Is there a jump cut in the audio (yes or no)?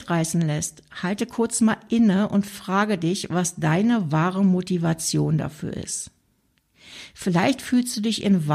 no